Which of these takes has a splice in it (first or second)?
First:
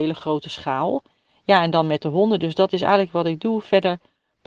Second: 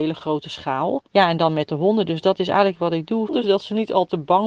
second